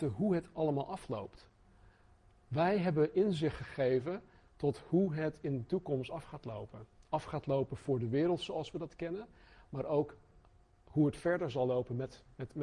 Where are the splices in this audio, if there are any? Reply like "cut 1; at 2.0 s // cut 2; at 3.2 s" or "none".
none